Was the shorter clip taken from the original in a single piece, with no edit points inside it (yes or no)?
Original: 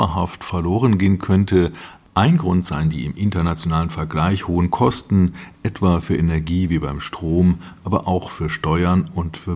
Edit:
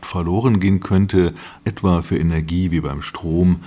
no